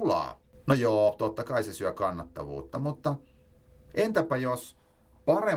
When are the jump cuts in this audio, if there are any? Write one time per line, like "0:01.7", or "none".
none